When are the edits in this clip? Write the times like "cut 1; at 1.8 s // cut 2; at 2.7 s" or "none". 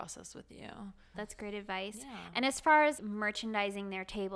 cut 1; at 1.1 s // cut 2; at 3.0 s